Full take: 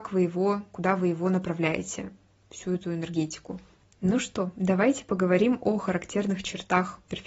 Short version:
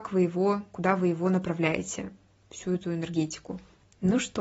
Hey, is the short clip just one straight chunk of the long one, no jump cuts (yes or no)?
yes